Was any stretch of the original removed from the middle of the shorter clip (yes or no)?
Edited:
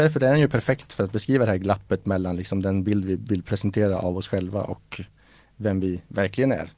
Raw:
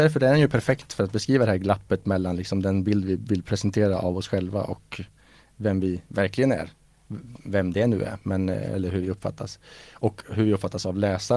no